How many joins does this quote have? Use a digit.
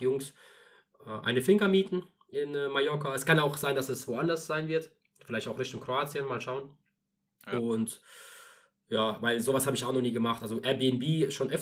0